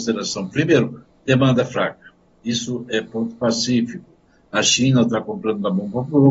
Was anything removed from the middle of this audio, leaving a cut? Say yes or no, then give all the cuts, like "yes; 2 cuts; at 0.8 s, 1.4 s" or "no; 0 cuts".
no; 0 cuts